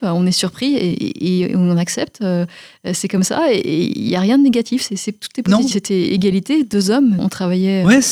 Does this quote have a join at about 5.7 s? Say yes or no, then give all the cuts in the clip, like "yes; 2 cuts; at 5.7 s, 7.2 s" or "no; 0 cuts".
yes; 2 cuts; at 5.7 s, 7.2 s